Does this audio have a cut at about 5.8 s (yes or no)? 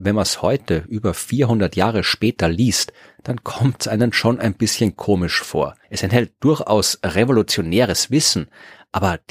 yes